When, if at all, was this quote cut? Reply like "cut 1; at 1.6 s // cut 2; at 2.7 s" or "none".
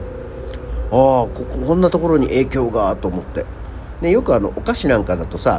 none